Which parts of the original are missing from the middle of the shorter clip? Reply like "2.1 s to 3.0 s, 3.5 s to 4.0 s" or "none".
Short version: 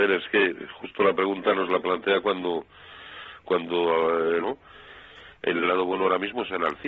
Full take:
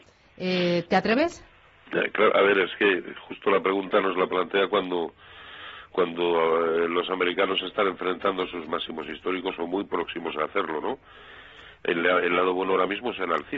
6.9 s to 10.8 s, 12.0 s to 12.3 s